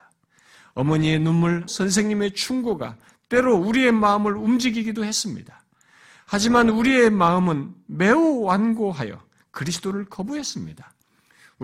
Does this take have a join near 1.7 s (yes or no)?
yes